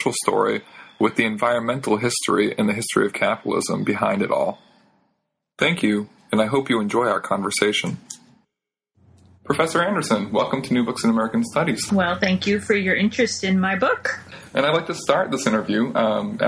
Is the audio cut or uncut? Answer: cut